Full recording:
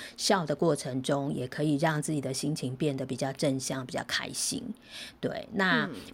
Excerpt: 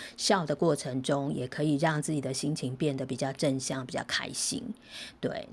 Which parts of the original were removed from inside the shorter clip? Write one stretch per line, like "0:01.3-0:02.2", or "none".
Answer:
none